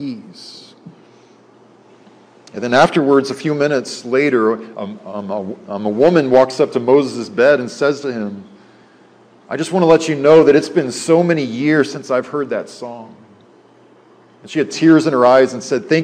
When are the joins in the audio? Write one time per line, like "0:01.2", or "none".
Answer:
none